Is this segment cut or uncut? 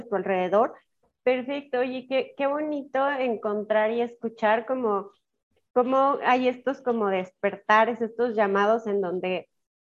cut